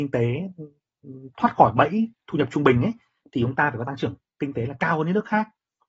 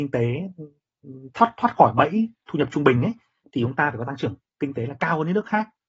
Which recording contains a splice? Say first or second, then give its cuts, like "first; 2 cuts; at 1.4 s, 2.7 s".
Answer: first; 1 cut; at 1.3 s